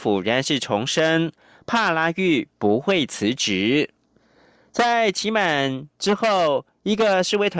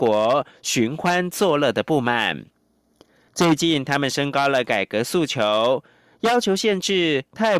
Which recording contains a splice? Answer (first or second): second